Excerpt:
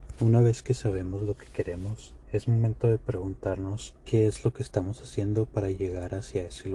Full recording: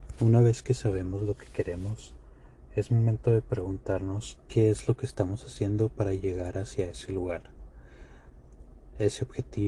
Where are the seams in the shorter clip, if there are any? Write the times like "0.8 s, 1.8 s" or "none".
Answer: 2.2 s